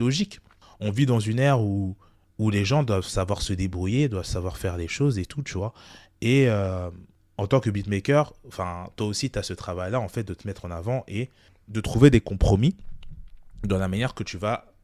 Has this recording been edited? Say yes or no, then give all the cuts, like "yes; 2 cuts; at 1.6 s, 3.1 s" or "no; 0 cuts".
no; 0 cuts